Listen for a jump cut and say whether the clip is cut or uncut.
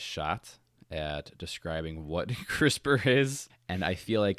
cut